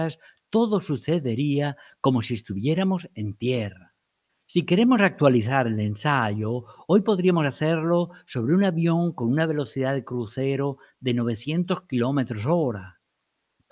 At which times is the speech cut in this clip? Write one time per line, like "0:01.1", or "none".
0:04.3